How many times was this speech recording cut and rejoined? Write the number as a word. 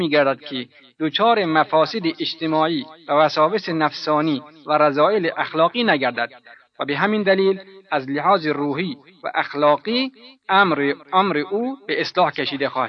zero